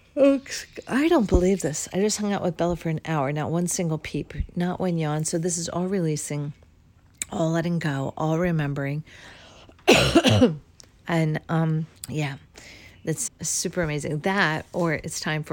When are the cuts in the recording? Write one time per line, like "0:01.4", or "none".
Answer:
0:12.0
0:13.3